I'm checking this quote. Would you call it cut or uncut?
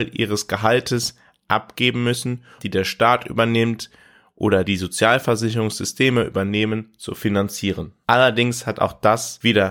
cut